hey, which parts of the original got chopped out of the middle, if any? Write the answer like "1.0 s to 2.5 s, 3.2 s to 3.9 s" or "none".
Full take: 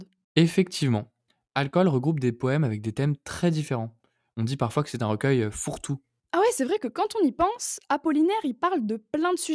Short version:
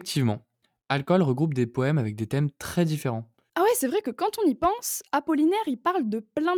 4.1 s to 6.3 s